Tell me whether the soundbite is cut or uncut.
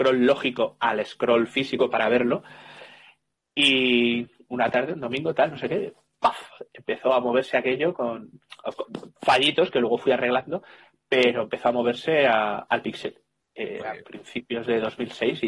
uncut